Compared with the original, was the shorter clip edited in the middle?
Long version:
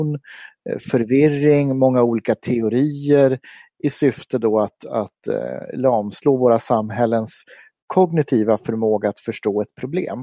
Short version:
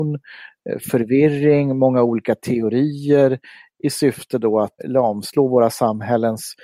yes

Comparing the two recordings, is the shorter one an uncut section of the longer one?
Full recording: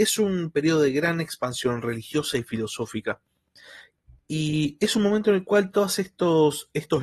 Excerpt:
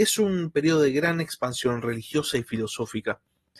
yes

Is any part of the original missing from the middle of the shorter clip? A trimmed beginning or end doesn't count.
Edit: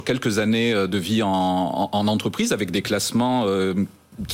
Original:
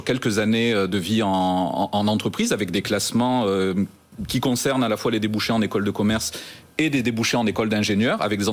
no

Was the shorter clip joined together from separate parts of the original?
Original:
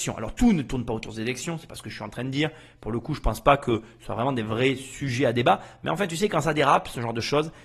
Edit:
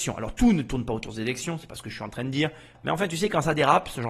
yes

